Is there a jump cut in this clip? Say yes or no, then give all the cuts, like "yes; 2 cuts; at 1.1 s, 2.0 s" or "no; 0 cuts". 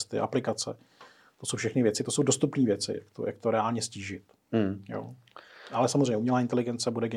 no; 0 cuts